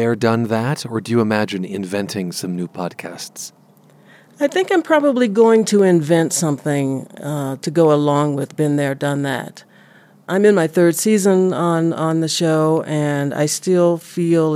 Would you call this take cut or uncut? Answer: uncut